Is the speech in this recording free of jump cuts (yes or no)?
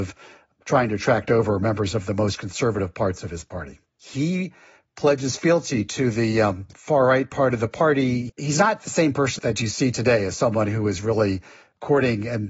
no